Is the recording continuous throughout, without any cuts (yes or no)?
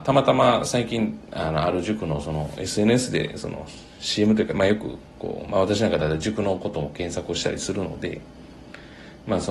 yes